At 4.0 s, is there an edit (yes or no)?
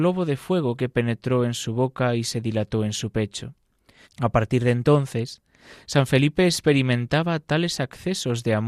yes